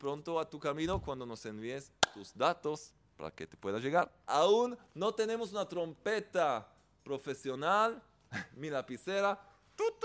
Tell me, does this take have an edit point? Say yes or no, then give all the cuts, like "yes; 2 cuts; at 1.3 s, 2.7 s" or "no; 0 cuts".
yes; 2 cuts; at 4.3 s, 8.3 s